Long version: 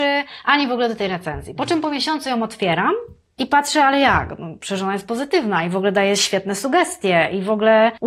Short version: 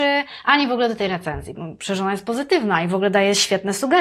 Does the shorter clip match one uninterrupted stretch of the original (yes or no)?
no